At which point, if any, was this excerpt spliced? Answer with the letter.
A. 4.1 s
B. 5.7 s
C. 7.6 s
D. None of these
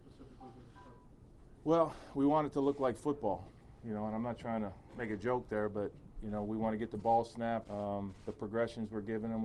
C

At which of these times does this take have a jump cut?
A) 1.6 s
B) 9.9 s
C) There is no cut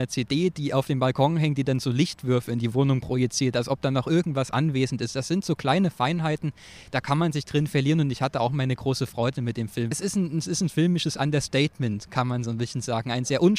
B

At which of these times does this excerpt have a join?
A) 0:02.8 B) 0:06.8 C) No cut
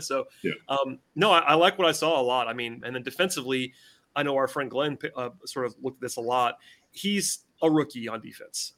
A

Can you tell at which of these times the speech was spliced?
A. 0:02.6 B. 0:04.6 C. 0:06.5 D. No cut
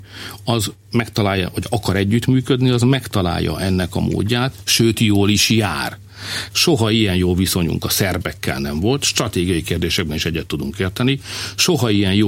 C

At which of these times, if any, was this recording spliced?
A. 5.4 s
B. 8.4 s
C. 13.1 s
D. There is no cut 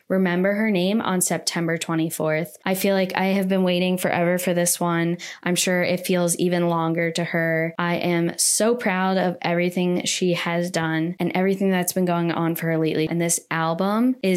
C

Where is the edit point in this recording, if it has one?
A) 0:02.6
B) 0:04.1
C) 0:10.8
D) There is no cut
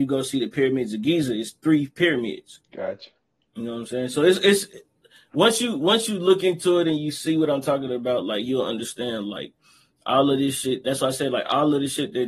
A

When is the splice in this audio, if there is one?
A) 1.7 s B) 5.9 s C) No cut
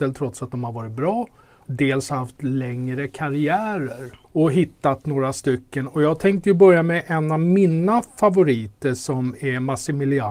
A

